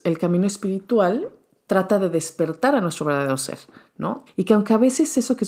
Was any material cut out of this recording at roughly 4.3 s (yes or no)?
yes